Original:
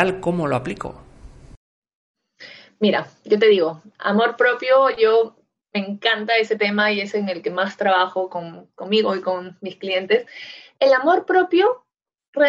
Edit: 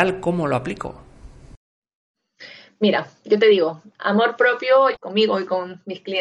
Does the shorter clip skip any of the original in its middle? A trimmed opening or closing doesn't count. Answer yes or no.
yes